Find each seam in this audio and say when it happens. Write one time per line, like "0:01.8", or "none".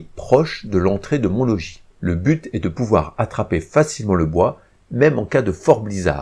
0:01.9

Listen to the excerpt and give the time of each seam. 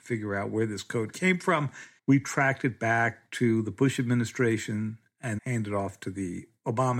0:02.0
0:05.4

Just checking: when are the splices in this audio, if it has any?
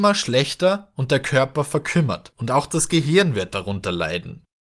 0:02.3

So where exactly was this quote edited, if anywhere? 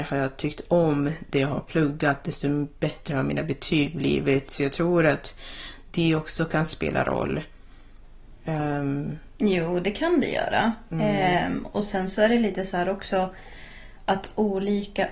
none

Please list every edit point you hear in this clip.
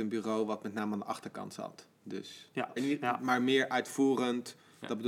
0:02.8

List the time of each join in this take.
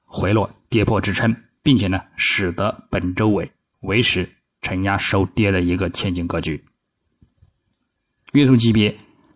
0:08.3

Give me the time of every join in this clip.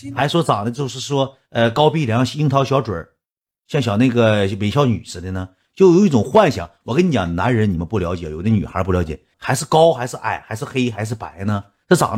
0:09.3

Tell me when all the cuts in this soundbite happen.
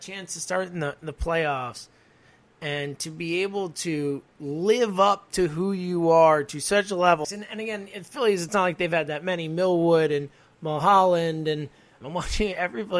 0:07.2
0:12.0

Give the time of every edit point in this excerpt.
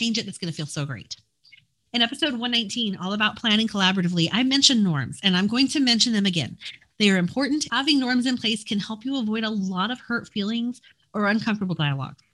0:07.7

